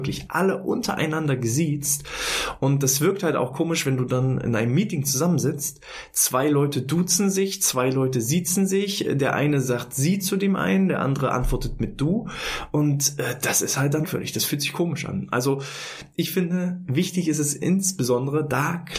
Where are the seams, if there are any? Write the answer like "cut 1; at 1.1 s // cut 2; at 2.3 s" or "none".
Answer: cut 1; at 14.0 s